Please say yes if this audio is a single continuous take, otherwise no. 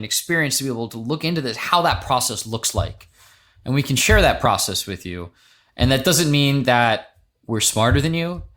yes